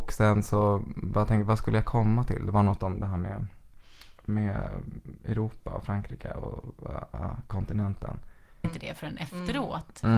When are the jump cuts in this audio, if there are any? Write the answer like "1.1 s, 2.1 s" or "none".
8.6 s